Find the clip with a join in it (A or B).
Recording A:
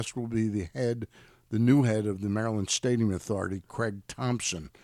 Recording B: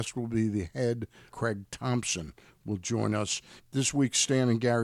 B